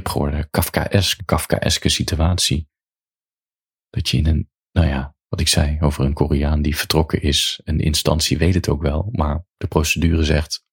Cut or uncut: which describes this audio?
cut